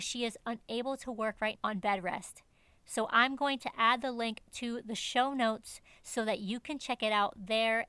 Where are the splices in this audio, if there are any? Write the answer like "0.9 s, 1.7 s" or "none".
1.6 s